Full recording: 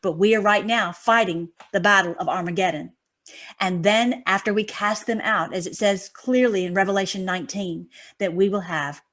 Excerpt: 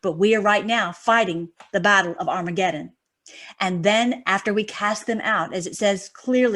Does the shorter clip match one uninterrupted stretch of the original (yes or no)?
yes